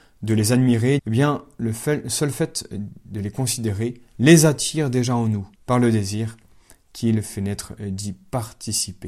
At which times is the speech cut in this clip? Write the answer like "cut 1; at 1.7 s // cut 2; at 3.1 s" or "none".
cut 1; at 1.0 s // cut 2; at 5.6 s